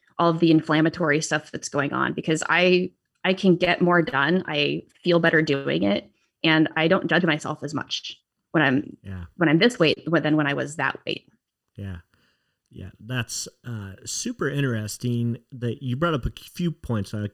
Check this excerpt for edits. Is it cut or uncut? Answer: uncut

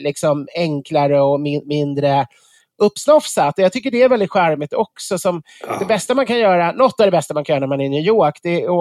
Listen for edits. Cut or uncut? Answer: uncut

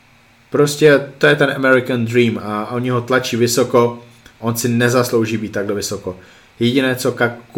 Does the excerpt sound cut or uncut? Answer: uncut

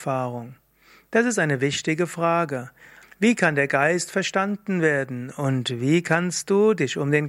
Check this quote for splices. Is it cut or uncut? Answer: cut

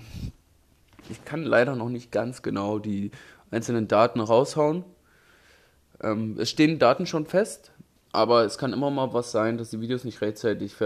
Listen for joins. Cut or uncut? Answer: cut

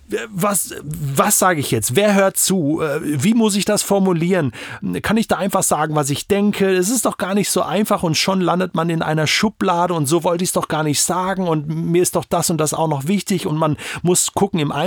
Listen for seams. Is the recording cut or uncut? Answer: uncut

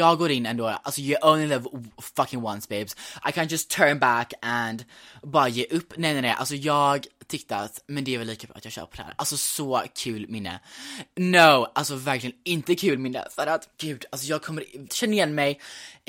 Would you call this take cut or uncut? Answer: cut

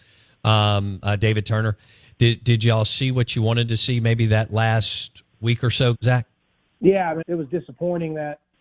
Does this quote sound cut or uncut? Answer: cut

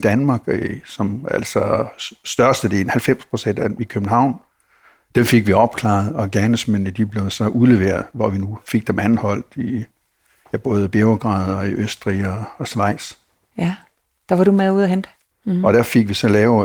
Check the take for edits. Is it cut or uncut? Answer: cut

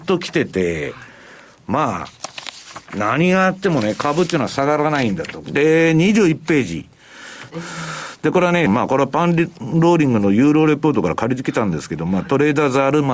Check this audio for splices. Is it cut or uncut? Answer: cut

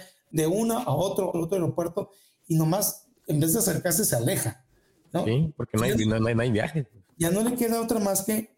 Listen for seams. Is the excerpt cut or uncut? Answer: cut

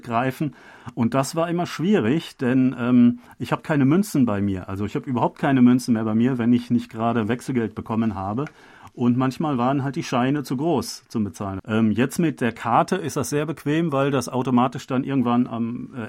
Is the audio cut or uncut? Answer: cut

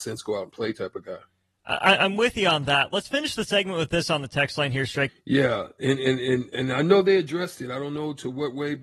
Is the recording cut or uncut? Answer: cut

